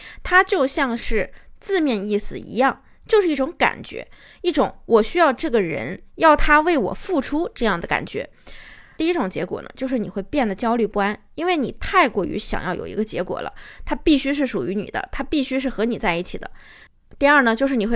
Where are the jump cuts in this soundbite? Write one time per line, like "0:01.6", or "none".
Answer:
0:09.0

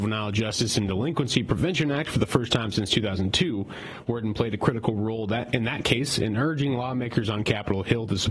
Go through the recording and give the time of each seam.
none

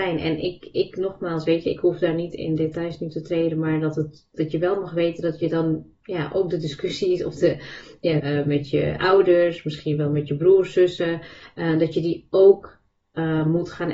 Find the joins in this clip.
0:08.2

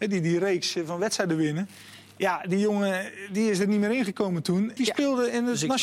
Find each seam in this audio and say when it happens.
0:04.8

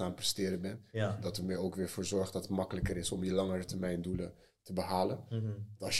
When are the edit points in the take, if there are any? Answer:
none

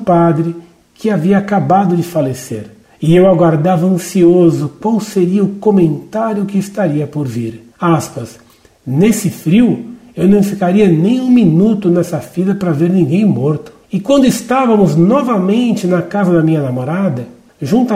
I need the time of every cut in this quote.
0:13.8

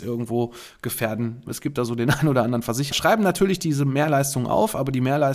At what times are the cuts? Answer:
0:01.5
0:02.9

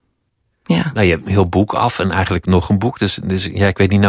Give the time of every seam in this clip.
0:01.2

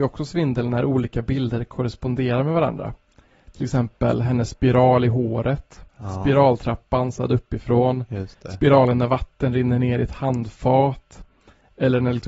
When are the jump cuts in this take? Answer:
0:05.9

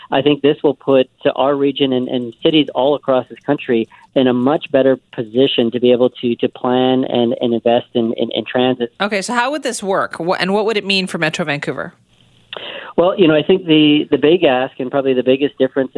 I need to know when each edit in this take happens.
0:08.9

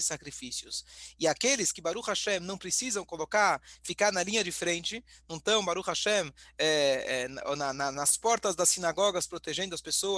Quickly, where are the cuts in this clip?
none

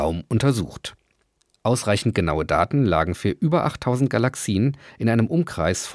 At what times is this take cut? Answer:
none

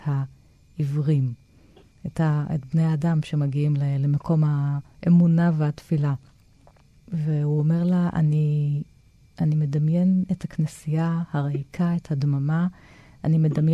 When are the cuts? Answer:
none

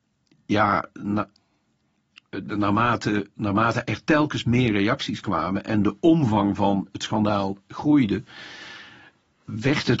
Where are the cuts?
none

